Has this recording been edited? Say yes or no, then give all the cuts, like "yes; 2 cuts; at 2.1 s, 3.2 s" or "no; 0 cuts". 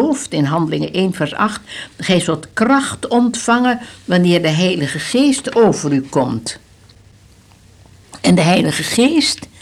no; 0 cuts